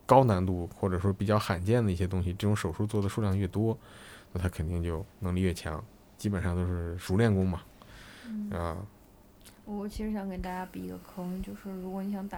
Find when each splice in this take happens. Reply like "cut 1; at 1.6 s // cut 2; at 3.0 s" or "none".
cut 1; at 5.1 s